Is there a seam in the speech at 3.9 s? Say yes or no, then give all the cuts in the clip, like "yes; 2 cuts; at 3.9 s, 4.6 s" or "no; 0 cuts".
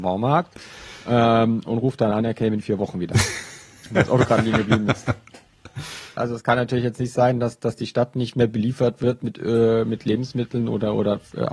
no; 1 cut; at 6.2 s